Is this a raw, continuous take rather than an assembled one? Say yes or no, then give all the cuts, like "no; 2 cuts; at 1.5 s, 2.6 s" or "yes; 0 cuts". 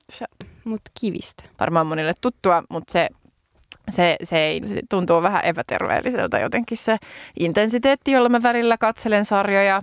no; 2 cuts; at 1.5 s, 4.6 s